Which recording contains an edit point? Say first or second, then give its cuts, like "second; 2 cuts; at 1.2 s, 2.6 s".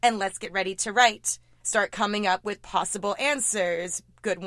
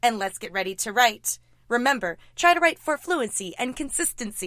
first; 1 cut; at 1.6 s